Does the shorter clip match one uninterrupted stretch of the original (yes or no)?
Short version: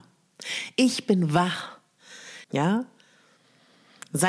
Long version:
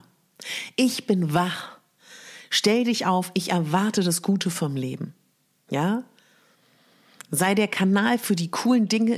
no